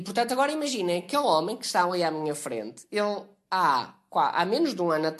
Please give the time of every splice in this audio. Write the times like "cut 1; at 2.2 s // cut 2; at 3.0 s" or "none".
none